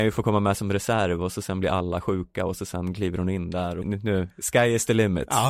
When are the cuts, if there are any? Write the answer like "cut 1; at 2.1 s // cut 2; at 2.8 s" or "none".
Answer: cut 1; at 3.8 s